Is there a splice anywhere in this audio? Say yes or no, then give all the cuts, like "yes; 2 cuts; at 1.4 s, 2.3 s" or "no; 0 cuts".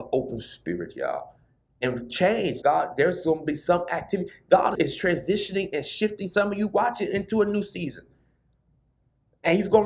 yes; 2 cuts; at 2.6 s, 4.8 s